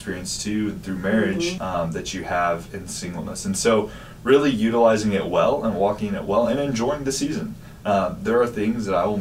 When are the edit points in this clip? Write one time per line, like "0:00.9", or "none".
0:01.6